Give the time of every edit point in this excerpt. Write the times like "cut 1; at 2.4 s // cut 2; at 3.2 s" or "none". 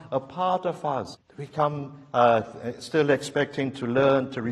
cut 1; at 1.1 s